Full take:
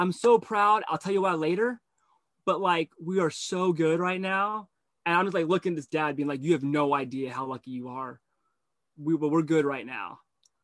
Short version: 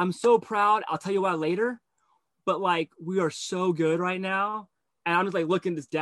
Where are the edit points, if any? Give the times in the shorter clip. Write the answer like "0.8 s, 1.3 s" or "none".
none